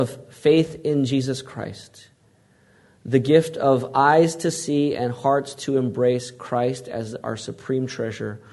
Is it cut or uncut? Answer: uncut